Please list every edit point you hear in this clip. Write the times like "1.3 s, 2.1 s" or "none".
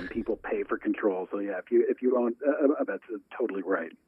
2.9 s